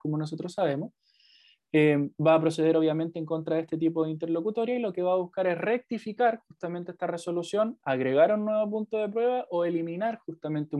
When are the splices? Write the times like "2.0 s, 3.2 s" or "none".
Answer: none